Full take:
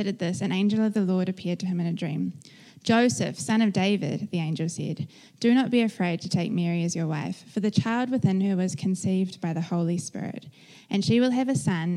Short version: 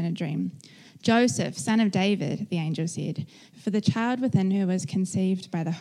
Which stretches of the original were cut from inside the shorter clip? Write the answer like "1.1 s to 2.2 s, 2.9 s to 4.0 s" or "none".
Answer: 5.3 s to 7.4 s